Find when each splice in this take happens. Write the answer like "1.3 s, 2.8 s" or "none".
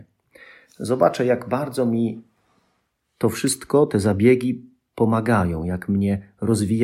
none